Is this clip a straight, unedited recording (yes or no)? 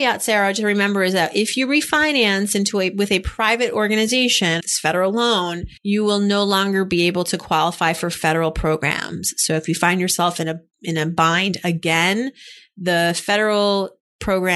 no